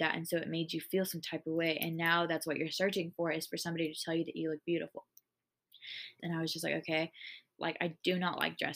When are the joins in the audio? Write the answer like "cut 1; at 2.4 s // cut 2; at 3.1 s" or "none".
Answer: cut 1; at 6.2 s // cut 2; at 7.6 s